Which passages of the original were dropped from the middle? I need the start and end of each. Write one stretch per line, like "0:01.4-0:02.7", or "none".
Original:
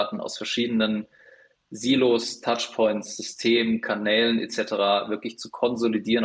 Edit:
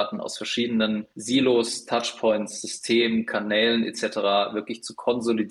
0:01.1-0:01.7